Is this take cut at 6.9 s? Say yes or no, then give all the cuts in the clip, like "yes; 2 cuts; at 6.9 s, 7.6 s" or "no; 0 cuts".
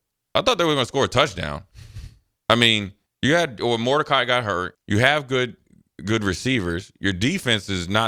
no; 2 cuts; at 3.1 s, 4.7 s